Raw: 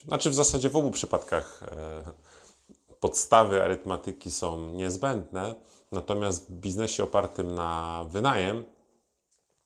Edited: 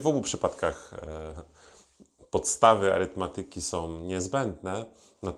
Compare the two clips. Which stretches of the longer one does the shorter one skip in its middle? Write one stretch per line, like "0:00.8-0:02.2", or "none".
none